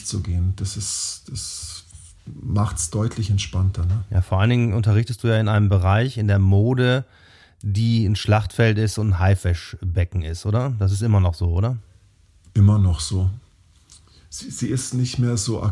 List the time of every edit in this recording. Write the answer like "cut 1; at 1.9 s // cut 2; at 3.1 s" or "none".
none